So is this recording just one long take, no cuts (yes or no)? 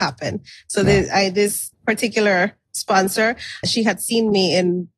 no